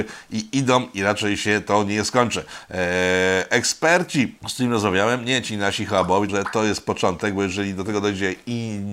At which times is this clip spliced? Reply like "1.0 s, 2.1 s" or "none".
4.4 s, 6.3 s